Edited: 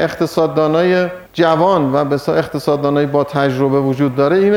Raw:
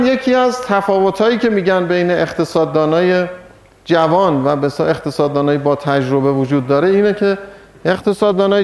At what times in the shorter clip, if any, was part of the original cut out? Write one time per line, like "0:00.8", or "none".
0:01.3